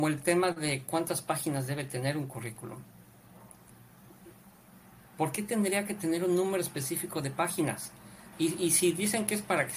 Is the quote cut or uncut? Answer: cut